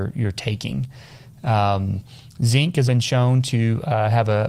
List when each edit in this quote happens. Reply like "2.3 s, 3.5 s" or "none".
2.9 s